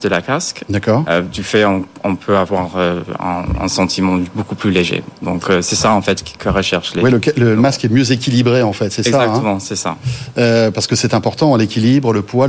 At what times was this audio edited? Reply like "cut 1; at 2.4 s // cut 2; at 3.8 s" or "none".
none